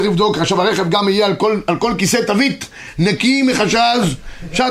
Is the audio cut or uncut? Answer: uncut